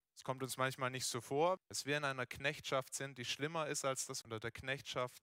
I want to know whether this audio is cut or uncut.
cut